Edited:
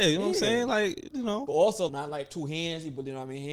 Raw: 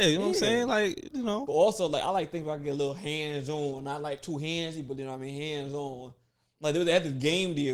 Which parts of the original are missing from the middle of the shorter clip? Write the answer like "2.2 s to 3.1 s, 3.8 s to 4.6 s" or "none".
1.9 s to 3.8 s